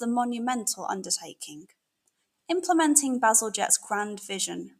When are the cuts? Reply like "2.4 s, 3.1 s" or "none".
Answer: 2.3 s